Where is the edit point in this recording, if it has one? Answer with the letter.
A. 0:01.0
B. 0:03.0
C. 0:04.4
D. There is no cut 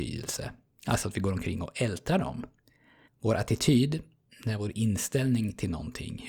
B